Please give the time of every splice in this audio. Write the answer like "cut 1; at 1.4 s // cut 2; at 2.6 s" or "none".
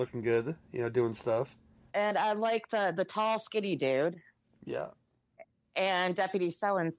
none